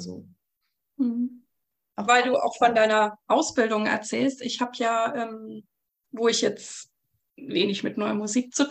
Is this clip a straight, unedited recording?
no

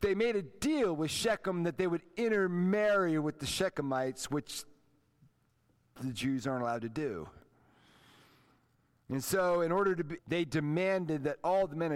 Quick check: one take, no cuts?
no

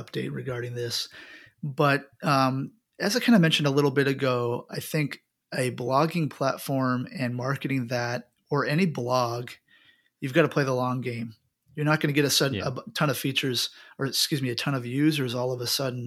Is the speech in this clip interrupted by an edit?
no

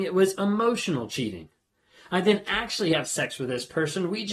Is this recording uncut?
yes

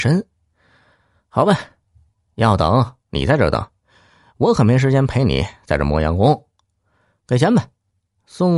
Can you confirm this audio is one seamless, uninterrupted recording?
yes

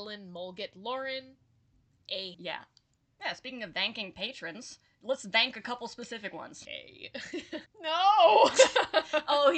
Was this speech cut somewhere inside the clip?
yes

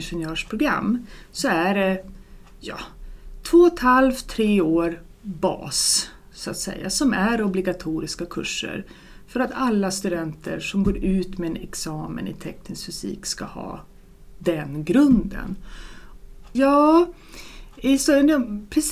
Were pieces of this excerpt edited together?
yes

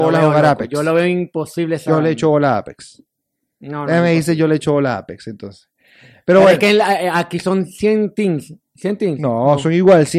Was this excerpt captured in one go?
yes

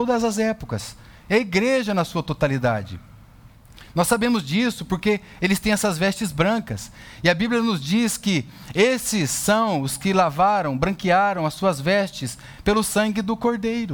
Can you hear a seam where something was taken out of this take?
no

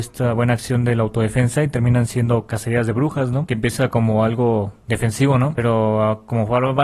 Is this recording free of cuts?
no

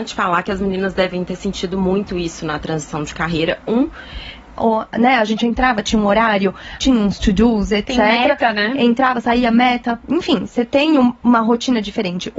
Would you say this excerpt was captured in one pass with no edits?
no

